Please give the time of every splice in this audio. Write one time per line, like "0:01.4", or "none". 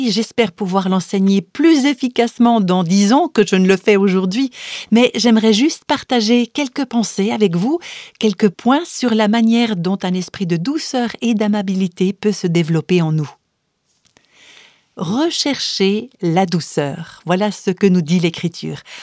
none